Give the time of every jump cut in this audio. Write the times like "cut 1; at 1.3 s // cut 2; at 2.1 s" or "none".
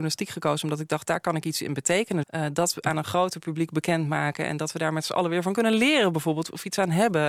cut 1; at 2.2 s